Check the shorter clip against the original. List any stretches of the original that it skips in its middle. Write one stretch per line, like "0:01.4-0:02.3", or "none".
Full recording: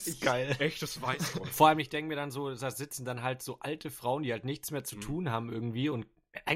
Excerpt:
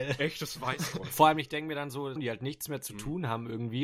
0:02.6-0:04.2